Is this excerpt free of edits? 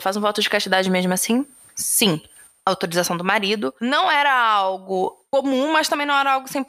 yes; 0 cuts

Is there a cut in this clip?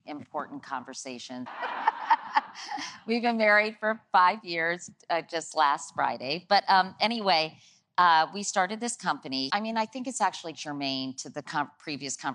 yes; 3 cuts; at 1.5 s, 9.5 s, 10.5 s

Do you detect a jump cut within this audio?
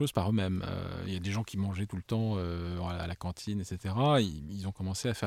no; 0 cuts

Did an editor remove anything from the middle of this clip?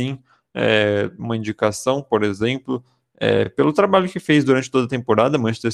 no; 0 cuts

